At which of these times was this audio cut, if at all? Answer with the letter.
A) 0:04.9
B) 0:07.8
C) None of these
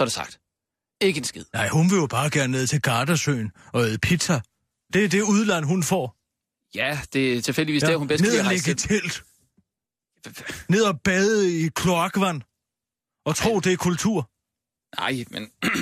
A